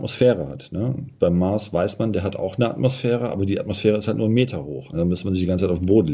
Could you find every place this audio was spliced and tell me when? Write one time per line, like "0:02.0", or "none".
0:04.9